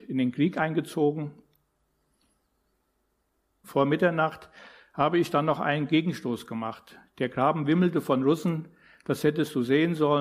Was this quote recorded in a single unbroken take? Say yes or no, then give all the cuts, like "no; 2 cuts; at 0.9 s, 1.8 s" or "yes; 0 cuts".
no; 1 cut; at 3.6 s